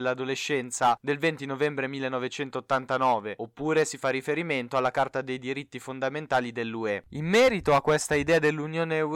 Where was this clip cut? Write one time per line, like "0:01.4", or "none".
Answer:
0:07.0

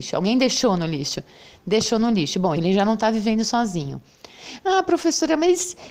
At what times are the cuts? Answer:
0:02.6

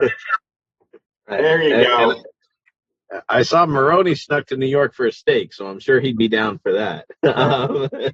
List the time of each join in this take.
0:01.1

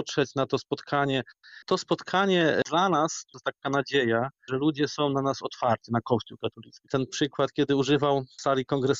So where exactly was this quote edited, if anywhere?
0:01.6
0:04.5
0:06.9

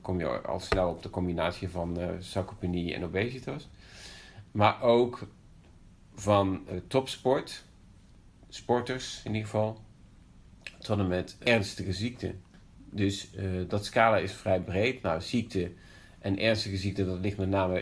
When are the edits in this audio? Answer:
none

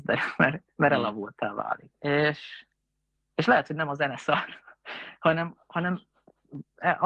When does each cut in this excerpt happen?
0:01.9

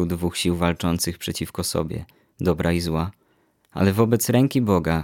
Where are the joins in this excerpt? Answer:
none

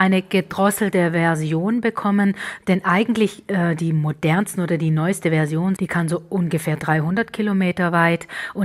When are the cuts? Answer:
0:05.8

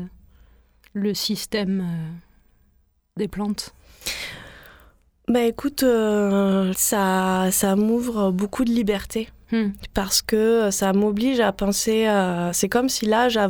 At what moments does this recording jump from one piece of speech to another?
0:06.7

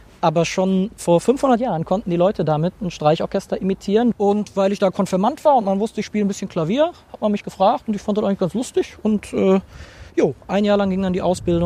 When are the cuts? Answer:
0:04.1

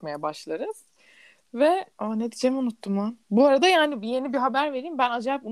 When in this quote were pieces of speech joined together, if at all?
0:01.9
0:03.2

